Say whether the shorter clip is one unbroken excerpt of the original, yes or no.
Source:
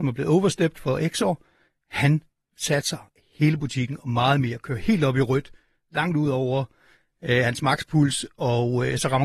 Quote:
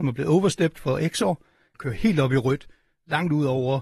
no